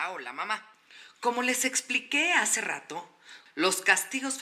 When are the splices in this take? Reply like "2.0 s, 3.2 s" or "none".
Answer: 3.5 s